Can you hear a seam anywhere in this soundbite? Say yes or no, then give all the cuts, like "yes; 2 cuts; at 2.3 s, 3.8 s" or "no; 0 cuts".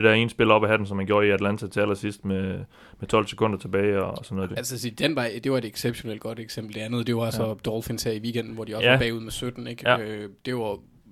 yes; 1 cut; at 4.5 s